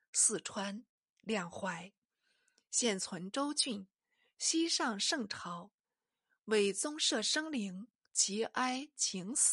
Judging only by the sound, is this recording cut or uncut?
uncut